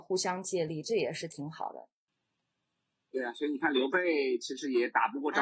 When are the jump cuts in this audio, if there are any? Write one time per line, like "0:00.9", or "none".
none